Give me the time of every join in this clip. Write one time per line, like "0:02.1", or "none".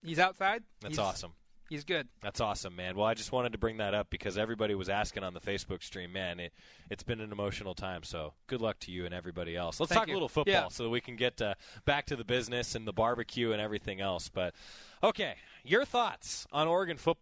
none